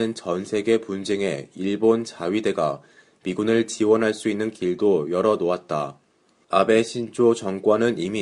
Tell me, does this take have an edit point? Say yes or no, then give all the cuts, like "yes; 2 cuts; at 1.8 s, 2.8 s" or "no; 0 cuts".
yes; 1 cut; at 6.4 s